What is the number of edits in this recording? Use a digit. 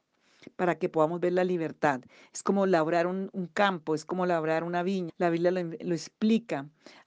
2